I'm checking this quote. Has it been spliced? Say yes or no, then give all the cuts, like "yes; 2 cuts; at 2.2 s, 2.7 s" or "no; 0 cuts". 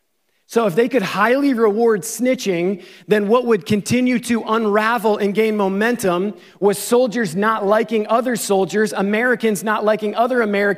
no; 0 cuts